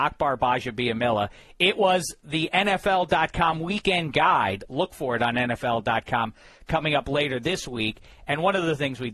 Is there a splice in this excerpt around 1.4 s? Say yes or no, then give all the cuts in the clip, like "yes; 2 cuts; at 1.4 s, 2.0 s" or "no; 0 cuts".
no; 0 cuts